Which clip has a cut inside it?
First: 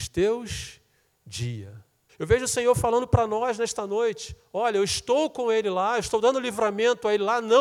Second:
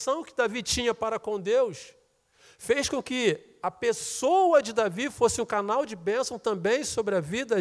first; 1 cut; at 2.1 s

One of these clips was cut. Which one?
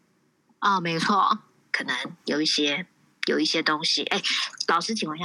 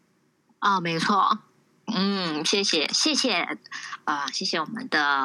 first; 1 cut; at 1.6 s

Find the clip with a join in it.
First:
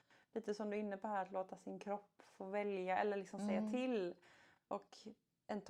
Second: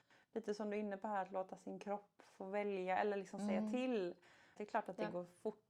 second; 1 cut; at 4.6 s

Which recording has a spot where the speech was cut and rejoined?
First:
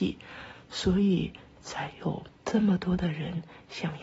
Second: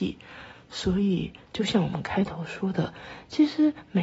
second; 1 cut; at 1.4 s

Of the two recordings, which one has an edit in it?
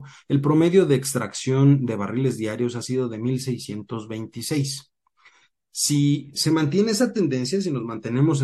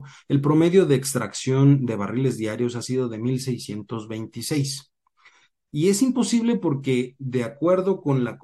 second; 1 cut; at 5.6 s

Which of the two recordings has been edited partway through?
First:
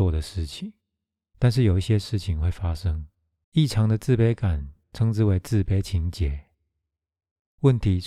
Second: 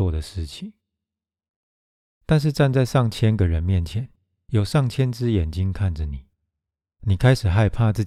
first; 2 cuts; at 1.3 s, 3.4 s

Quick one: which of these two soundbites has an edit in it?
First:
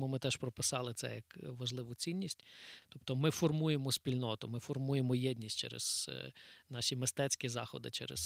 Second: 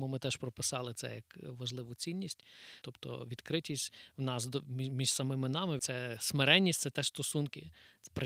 second; 2 cuts; at 2.8 s, 5.8 s

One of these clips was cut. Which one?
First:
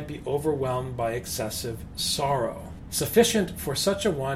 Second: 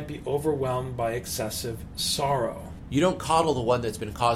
first; 1 cut; at 2.9 s

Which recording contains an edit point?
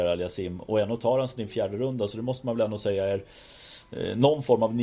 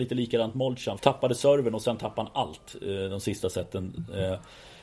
second; 1 cut; at 1.0 s

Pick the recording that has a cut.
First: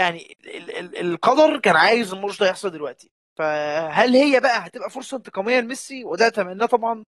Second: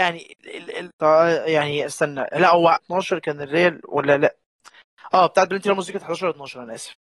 second; 2 cuts; at 0.9 s, 2.8 s

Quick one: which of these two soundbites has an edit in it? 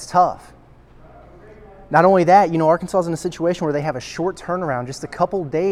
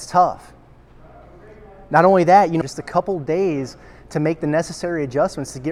second; 1 cut; at 2.6 s

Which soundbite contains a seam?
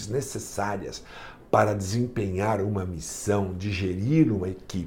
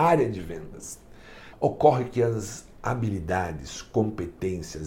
second; 1 cut; at 1.5 s

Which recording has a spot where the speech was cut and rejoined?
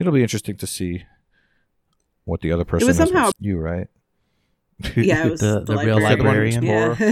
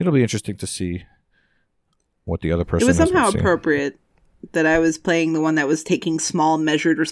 first; 1 cut; at 3.3 s

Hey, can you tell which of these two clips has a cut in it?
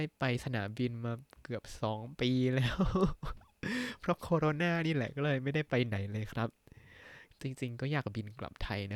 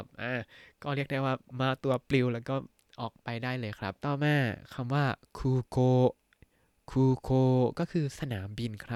second; 1 cut; at 4.0 s

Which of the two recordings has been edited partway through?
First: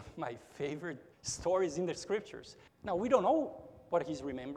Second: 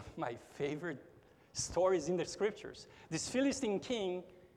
first; 2 cuts; at 1.1 s, 2.7 s

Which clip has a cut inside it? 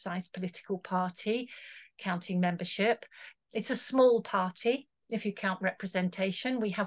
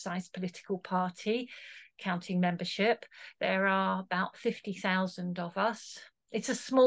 first; 1 cut; at 3.4 s

